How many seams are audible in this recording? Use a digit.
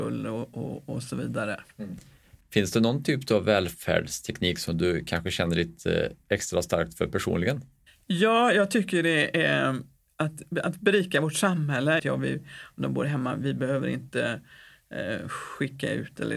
1